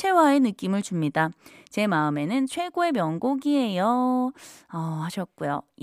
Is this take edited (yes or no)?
no